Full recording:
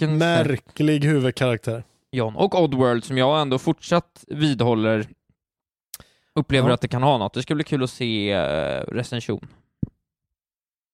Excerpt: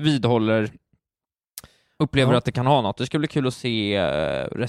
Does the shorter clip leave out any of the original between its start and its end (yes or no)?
no